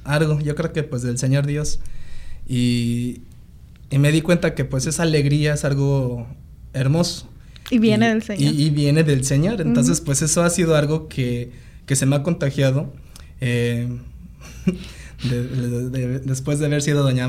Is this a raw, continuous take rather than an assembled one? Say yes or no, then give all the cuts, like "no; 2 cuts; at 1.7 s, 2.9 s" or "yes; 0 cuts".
yes; 0 cuts